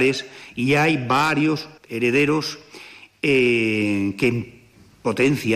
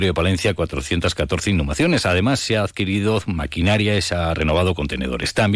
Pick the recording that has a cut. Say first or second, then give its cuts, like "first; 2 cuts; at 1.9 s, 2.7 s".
first; 1 cut; at 1.8 s